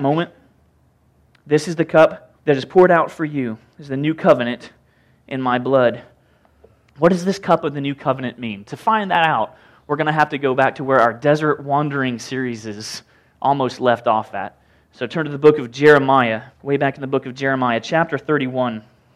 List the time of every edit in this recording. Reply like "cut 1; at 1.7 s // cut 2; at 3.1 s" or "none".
cut 1; at 2.4 s // cut 2; at 6.9 s // cut 3; at 16.5 s